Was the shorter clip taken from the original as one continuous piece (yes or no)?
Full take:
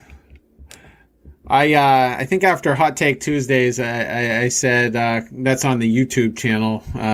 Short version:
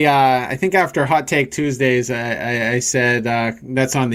yes